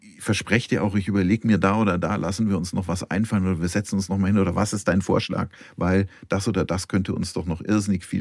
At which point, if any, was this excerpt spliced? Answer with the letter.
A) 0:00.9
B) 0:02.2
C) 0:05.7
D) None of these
D